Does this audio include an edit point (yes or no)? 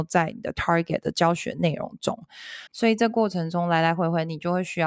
yes